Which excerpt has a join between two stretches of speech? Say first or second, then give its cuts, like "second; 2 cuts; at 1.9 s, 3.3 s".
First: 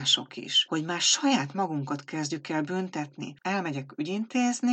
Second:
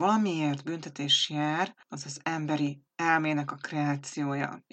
first; 1 cut; at 3.4 s